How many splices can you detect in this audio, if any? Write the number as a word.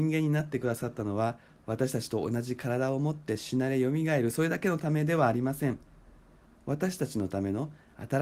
zero